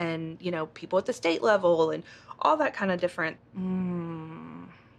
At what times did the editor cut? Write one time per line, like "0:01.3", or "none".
0:03.4